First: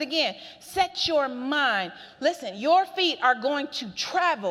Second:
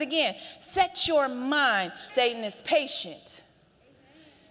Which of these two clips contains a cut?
second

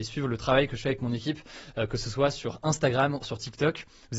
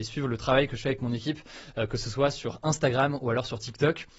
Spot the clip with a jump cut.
first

